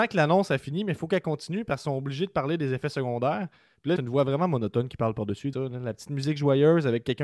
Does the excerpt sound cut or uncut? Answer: cut